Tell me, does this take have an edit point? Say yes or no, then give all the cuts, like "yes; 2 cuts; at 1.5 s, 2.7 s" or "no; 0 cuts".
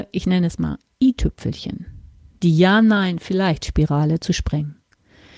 no; 0 cuts